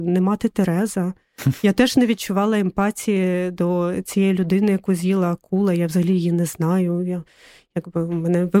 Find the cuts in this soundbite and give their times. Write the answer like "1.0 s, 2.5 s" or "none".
none